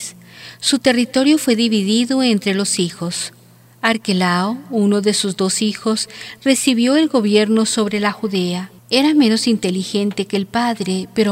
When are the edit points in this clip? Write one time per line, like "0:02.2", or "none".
0:08.8